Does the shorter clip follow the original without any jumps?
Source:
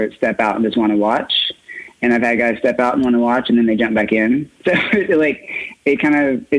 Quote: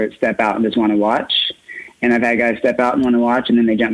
yes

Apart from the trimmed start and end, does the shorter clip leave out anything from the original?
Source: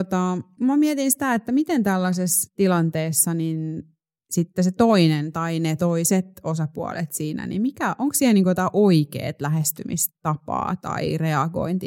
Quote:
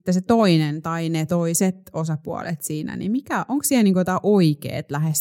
no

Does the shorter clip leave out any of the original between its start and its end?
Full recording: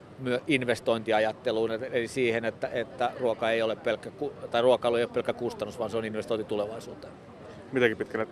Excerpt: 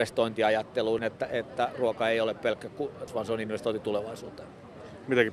yes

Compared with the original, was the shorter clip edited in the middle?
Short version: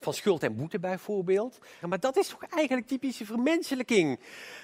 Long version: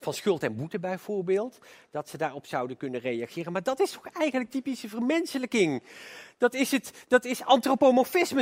yes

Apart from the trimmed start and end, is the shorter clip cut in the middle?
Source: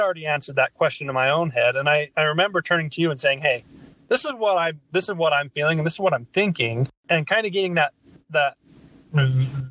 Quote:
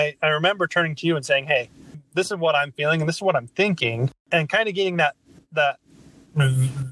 yes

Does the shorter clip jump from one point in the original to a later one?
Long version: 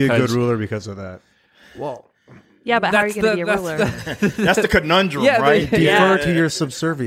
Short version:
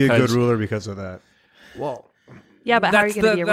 no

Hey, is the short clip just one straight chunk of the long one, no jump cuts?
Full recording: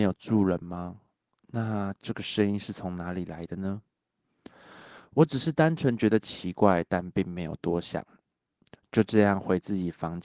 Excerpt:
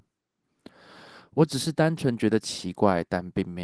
yes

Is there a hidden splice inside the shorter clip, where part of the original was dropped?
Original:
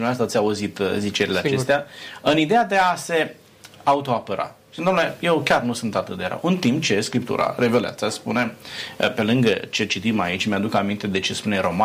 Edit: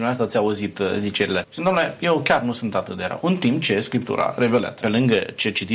yes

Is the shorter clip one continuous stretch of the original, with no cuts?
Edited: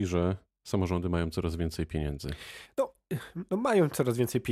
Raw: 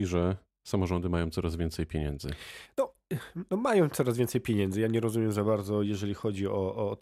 yes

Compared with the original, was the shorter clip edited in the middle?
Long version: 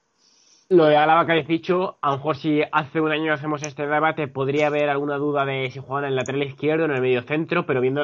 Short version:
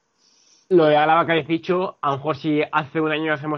no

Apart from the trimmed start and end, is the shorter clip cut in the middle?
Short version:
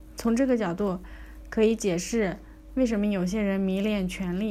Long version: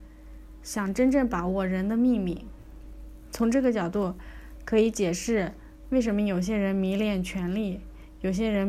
no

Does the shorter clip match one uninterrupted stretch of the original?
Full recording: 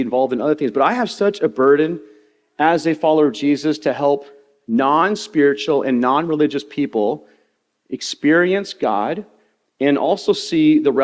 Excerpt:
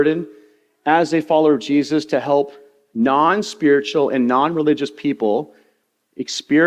yes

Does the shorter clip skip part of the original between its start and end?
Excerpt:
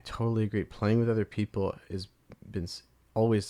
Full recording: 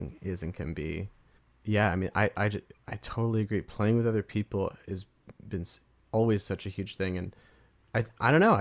no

